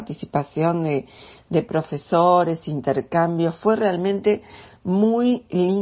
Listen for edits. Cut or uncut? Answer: uncut